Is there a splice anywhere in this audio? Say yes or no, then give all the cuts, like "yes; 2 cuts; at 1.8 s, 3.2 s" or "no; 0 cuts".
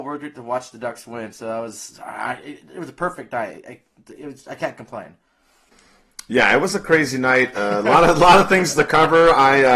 no; 0 cuts